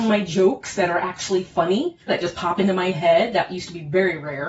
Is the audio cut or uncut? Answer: cut